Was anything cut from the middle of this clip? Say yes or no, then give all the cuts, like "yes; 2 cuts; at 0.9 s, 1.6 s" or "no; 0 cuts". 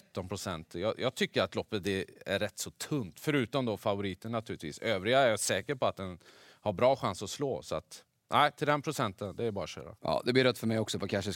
yes; 1 cut; at 10.0 s